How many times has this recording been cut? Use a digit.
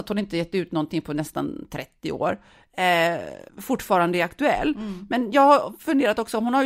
1